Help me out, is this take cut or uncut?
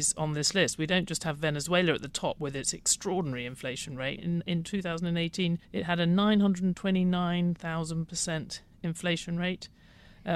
cut